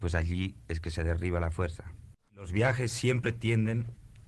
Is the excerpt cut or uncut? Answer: cut